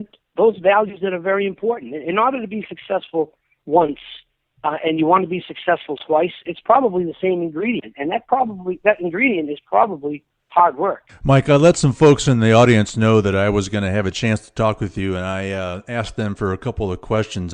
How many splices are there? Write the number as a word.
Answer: zero